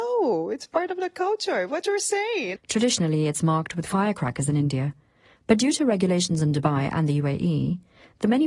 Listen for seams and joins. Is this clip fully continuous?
no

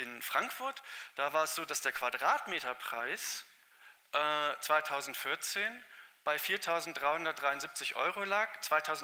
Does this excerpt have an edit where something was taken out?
no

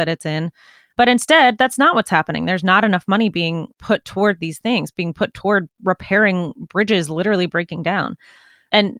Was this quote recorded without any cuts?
yes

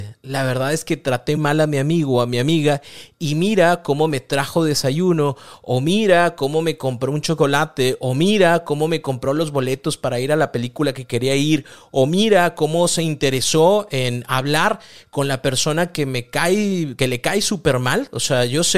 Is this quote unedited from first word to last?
no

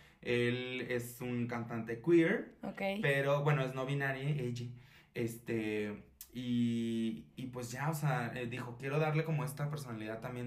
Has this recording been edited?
no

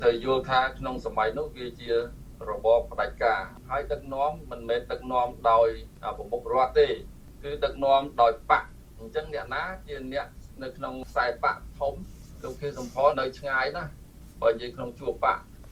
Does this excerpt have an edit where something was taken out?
yes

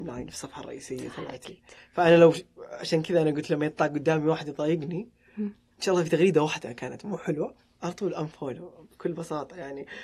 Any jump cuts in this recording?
no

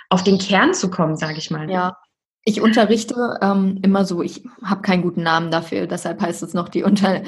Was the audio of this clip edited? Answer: yes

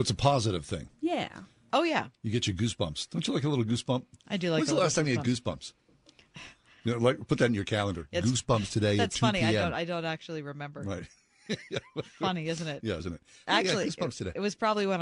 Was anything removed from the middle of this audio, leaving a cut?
yes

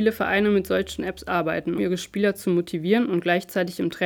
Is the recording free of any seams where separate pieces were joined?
no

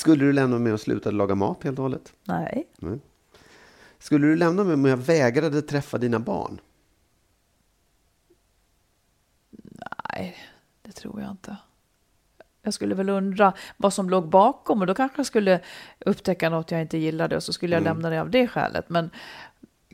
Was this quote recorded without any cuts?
yes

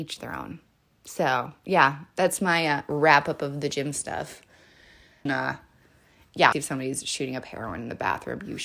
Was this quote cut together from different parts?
yes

